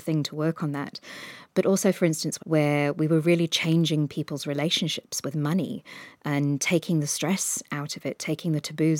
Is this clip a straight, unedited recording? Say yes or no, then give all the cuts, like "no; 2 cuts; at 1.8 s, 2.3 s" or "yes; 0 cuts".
no; 1 cut; at 2.4 s